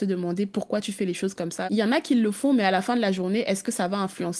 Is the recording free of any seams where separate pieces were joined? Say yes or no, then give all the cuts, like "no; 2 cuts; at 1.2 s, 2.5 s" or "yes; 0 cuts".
no; 1 cut; at 1.7 s